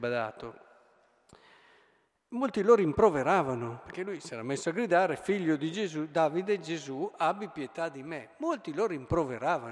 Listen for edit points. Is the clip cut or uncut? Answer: uncut